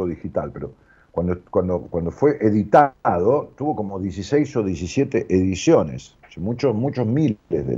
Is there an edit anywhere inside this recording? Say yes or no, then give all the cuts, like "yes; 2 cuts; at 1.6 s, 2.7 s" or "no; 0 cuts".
no; 0 cuts